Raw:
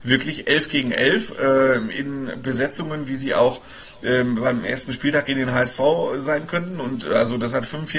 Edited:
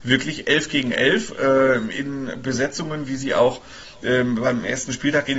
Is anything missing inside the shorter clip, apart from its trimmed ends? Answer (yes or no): no